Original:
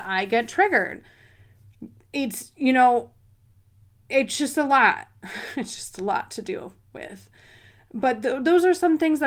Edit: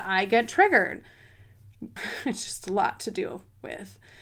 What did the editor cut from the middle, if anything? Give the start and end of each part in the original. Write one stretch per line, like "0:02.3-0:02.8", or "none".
0:02.0-0:05.3